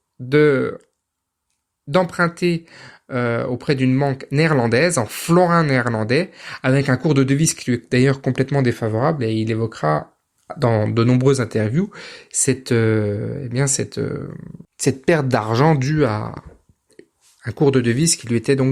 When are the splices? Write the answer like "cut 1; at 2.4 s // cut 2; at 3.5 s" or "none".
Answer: cut 1; at 14.6 s